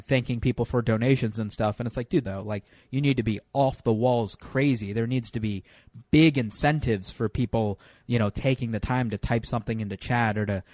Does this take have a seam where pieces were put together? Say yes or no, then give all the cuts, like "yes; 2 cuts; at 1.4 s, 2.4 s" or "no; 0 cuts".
yes; 1 cut; at 2.2 s